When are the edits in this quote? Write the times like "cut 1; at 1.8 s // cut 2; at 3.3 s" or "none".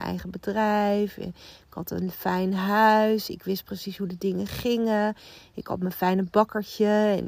none